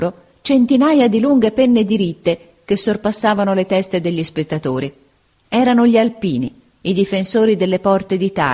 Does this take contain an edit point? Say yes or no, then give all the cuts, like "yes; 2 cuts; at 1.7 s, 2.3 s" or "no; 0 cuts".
no; 0 cuts